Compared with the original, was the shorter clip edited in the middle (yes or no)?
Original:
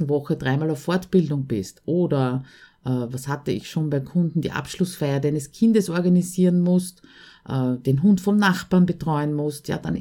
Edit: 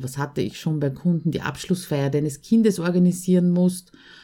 no